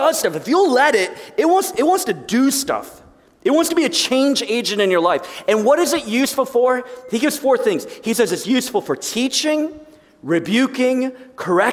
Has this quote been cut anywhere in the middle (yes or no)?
no